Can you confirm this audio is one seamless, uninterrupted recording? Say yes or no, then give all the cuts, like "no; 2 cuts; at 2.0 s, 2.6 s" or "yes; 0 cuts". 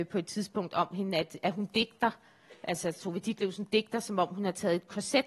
yes; 0 cuts